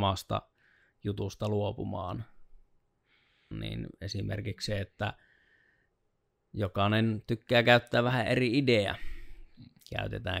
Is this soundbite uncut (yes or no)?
no